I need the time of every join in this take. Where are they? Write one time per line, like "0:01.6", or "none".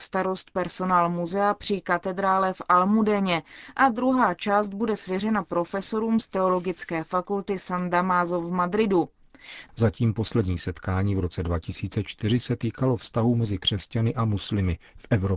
0:09.7